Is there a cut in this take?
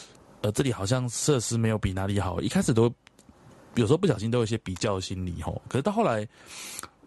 no; 0 cuts

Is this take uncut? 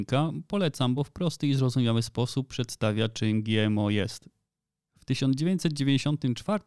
yes; 0 cuts

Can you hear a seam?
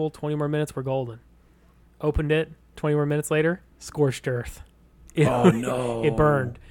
yes; 1 cut; at 3.7 s

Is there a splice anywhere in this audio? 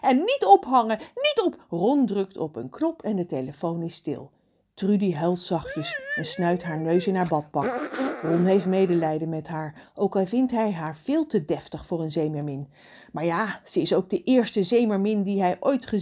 no; 0 cuts

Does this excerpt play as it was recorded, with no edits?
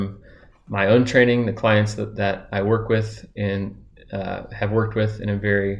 yes; 0 cuts

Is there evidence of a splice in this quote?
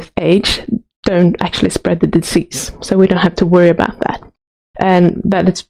yes; 1 cut; at 4.7 s

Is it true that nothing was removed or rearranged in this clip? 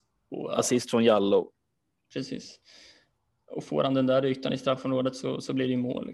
yes; 0 cuts

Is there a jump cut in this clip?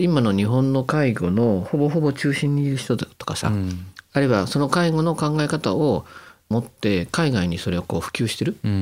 no; 0 cuts

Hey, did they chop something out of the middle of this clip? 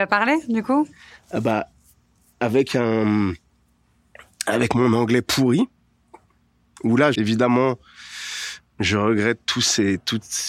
yes; 1 cut; at 7.1 s

